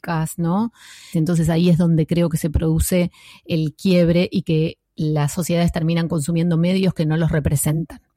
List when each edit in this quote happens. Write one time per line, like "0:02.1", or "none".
0:01.1